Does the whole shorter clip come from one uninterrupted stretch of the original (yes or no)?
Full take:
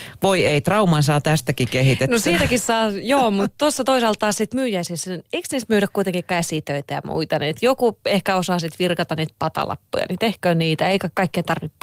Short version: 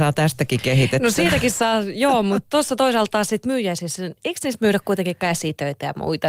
yes